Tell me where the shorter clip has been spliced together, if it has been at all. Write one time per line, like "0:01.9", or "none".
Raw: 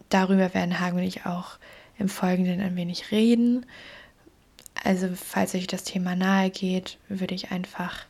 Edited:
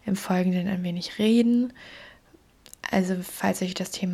none